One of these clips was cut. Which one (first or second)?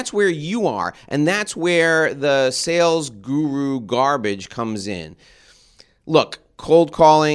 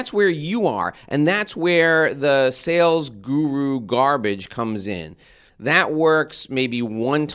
second